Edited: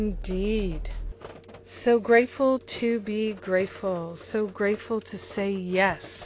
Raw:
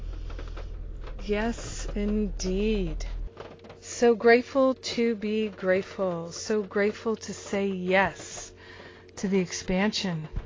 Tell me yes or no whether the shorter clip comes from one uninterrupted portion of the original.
yes